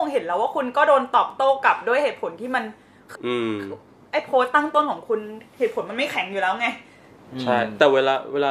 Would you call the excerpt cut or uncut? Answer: cut